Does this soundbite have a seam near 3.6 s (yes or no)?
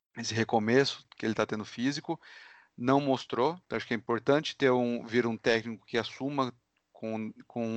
no